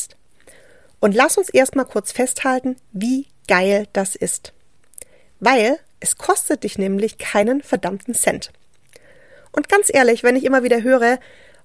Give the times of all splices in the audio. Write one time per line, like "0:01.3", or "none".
none